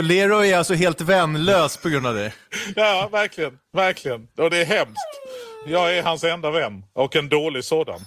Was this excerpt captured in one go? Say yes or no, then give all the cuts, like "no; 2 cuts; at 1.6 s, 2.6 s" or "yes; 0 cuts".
yes; 0 cuts